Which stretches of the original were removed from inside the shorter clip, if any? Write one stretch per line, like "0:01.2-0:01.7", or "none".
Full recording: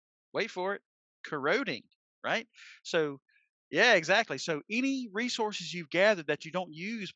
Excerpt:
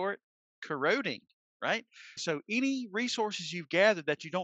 0:02.8-0:04.4